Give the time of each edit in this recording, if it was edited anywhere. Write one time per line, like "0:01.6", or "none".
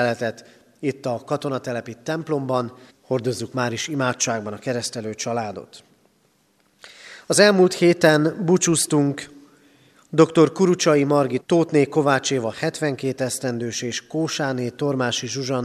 0:02.9
0:11.4